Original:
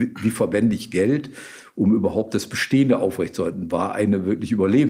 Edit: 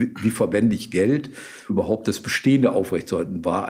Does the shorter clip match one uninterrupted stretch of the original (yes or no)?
no